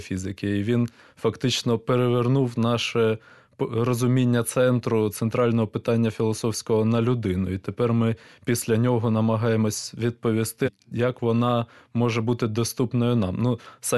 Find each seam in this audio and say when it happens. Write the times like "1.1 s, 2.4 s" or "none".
10.6 s